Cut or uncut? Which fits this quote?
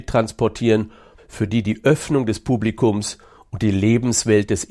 cut